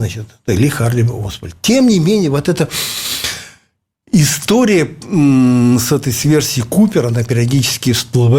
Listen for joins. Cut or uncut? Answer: uncut